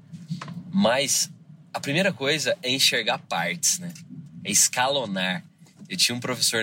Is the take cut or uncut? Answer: uncut